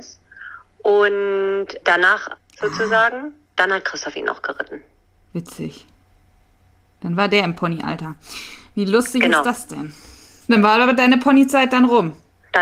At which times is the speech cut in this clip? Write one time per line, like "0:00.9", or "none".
0:02.4